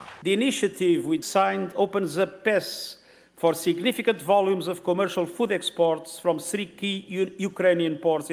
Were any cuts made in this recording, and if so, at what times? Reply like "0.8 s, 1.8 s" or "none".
1.2 s